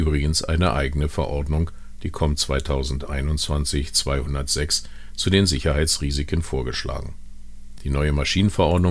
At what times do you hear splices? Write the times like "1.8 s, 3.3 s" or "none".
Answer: none